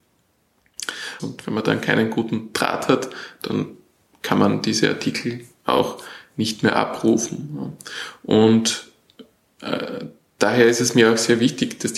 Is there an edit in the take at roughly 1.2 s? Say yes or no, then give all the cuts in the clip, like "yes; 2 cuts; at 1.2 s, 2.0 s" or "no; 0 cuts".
yes; 1 cut; at 1.2 s